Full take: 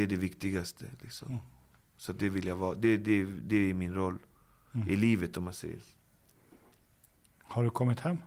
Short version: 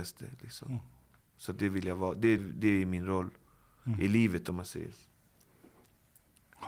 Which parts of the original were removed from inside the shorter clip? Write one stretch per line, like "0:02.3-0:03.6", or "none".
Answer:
0:03.0-0:03.3